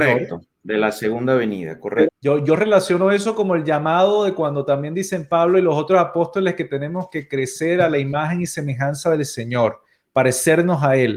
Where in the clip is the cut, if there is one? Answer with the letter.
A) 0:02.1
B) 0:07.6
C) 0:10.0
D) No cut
A